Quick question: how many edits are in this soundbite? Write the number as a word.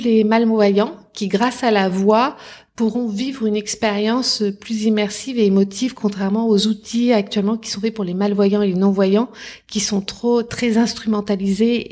zero